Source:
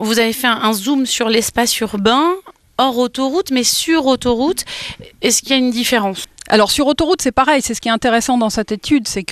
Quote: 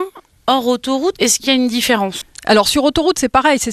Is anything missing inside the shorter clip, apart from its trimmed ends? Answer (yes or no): yes